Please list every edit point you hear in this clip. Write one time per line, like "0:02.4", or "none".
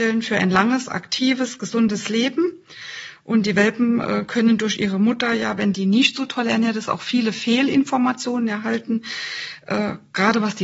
none